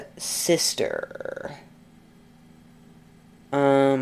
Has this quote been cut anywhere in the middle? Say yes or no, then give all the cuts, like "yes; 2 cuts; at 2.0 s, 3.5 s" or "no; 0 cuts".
no; 0 cuts